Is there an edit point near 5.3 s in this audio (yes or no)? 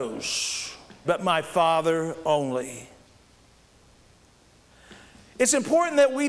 no